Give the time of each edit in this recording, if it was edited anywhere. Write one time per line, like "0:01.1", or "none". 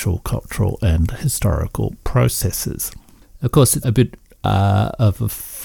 0:03.8